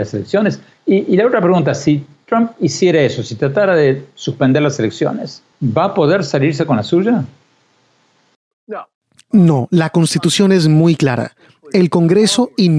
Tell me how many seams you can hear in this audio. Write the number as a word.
one